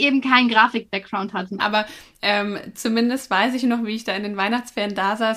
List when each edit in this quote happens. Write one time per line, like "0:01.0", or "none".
0:01.6